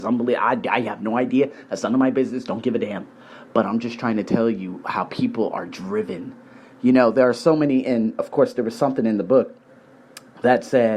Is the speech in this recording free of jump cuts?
yes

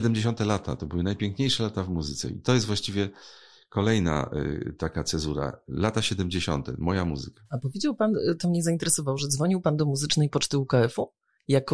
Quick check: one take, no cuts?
yes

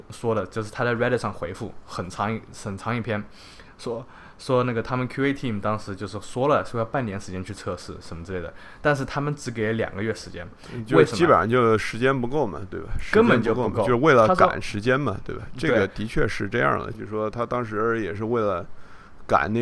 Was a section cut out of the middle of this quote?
yes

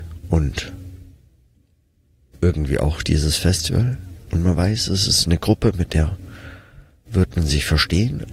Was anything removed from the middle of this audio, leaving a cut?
no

